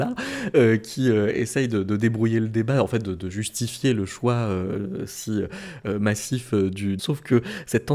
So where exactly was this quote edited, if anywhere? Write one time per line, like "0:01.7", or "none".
0:07.0